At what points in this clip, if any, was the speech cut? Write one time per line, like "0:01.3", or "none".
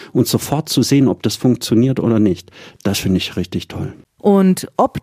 none